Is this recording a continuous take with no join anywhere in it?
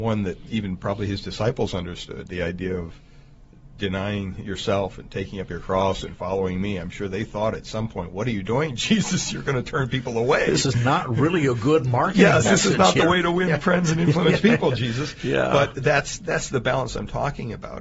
yes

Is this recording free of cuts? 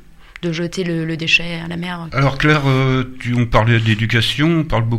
no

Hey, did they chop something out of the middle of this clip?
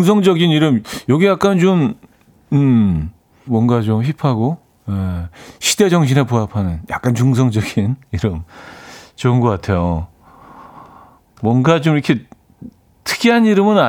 yes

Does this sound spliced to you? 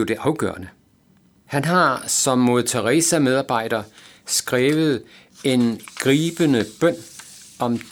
yes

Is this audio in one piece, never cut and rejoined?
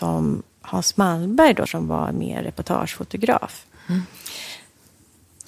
no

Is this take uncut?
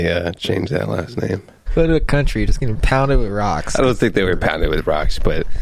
no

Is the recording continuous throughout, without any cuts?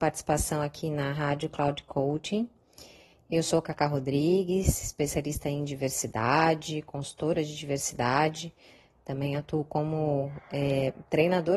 yes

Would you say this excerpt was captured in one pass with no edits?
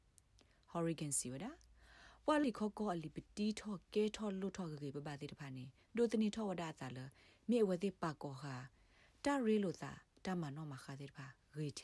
no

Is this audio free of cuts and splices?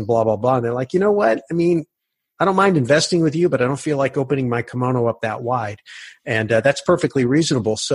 yes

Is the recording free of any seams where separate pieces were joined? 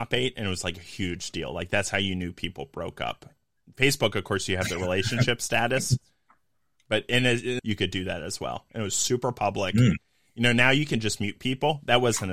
no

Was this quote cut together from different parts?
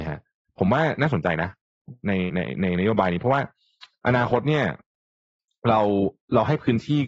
no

